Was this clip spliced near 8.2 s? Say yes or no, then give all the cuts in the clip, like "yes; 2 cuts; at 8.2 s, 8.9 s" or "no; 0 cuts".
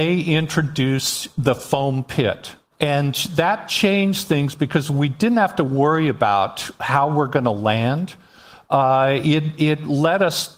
no; 0 cuts